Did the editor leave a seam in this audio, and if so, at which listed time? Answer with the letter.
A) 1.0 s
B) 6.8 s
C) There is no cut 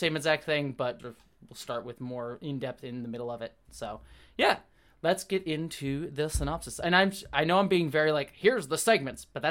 A